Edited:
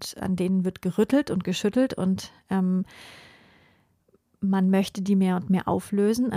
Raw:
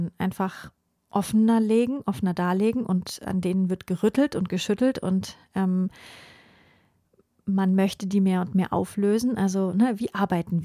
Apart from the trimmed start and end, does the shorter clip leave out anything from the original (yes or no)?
no